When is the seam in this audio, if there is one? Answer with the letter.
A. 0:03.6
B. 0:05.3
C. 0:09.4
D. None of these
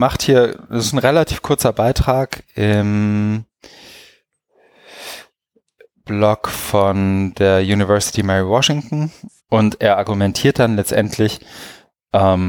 C